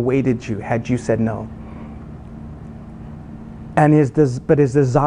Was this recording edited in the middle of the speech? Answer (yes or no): yes